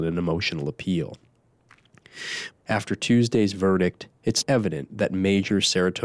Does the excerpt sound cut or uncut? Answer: cut